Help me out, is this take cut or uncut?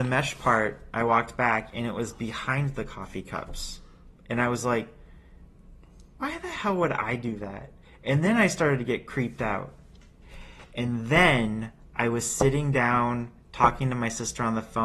uncut